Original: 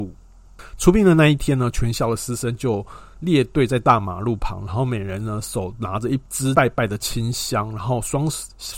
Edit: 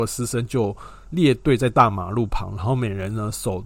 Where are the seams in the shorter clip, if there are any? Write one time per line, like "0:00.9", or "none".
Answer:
none